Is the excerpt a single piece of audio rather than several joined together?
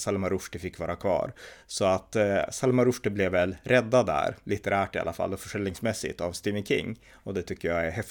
yes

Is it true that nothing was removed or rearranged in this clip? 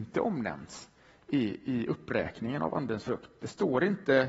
yes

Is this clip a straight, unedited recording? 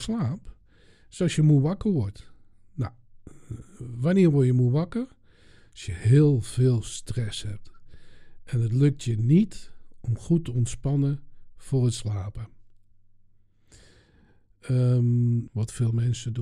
no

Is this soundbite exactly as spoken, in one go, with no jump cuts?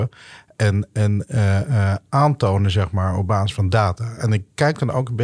yes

